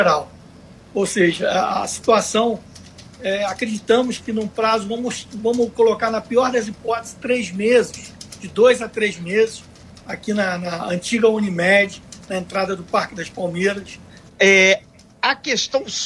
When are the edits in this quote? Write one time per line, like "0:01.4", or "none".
0:10.0
0:14.3